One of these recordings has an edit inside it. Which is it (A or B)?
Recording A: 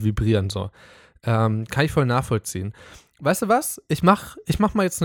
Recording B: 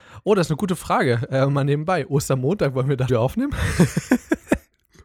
B